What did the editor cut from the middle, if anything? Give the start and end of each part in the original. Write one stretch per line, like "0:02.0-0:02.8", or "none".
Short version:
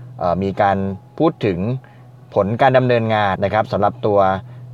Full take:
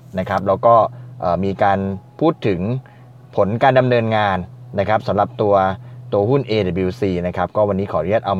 0:04.4-0:04.7